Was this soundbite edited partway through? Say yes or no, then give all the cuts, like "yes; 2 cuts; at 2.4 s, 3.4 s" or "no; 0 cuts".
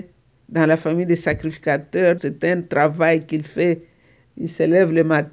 yes; 2 cuts; at 2.2 s, 4.2 s